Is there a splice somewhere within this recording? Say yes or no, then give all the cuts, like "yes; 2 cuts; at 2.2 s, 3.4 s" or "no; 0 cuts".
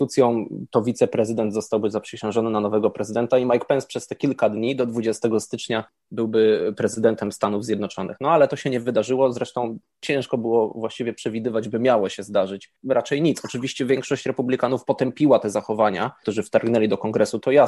yes; 2 cuts; at 12.8 s, 16.2 s